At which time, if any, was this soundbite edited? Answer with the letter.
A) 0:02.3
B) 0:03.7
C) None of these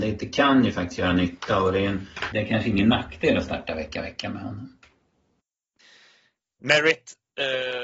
A